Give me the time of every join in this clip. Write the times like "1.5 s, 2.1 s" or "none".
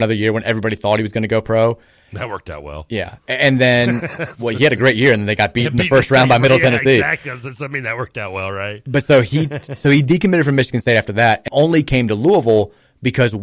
11.5 s